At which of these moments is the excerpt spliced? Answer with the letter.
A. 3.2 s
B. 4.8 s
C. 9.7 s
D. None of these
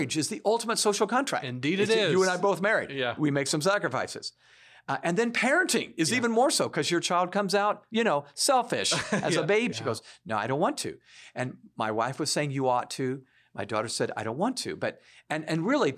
C